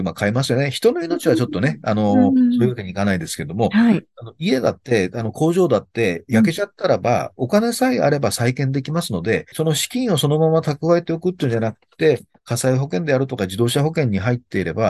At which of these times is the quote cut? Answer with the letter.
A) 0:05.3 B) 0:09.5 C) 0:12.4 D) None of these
B